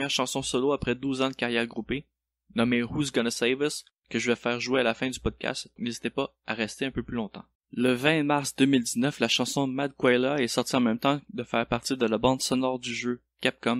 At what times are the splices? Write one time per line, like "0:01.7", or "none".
0:05.8